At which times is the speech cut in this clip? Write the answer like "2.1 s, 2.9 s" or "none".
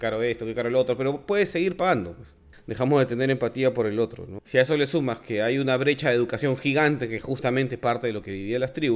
2.5 s, 4.4 s